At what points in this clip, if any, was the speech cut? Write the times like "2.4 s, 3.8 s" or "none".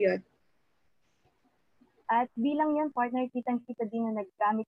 2.0 s